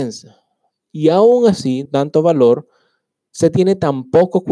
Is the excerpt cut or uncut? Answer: cut